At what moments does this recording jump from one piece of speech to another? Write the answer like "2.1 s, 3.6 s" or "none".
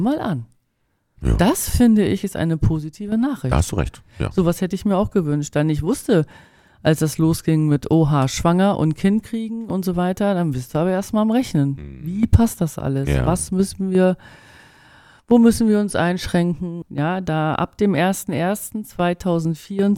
16.8 s